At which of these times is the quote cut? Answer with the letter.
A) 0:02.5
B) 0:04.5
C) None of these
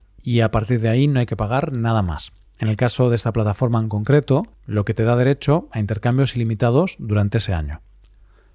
B